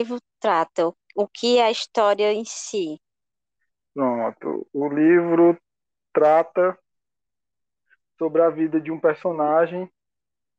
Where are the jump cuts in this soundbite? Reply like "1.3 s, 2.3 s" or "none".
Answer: none